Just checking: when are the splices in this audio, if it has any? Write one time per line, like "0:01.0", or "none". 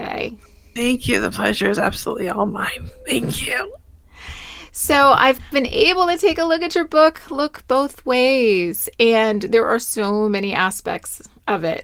none